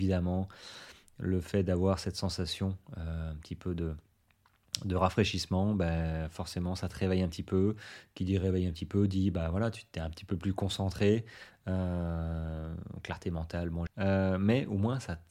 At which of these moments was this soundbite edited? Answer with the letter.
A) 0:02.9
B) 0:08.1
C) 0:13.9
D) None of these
C